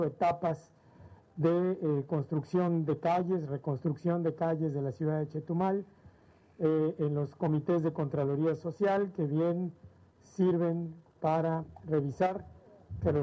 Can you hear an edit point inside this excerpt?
no; 0 cuts

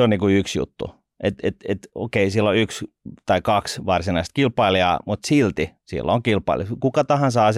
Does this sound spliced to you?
no; 0 cuts

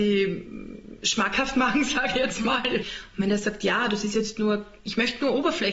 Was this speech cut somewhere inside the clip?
yes; 1 cut; at 2.8 s

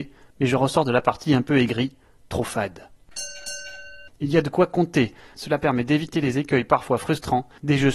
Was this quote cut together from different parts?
yes; 2 cuts; at 4.1 s, 5.3 s

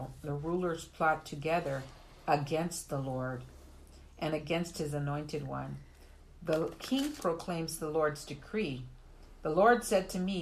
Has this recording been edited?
yes; 1 cut; at 6.2 s

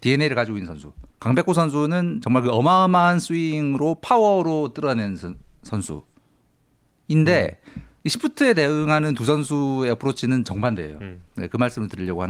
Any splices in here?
yes; 1 cut; at 1.1 s

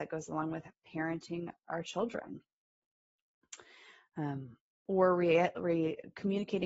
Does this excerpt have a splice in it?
no; 0 cuts

